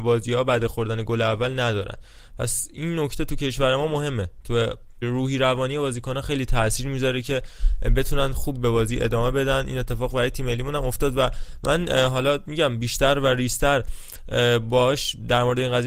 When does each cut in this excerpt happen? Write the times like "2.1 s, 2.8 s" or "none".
5.0 s